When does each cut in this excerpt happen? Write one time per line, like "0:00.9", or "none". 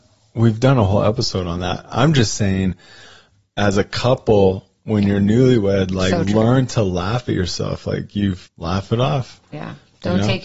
0:08.5